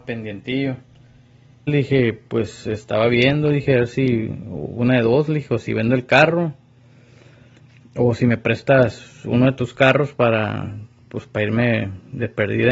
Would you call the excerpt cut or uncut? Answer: cut